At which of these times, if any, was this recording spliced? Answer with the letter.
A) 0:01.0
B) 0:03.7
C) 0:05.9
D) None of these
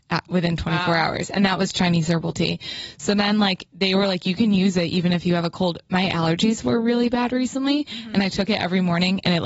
B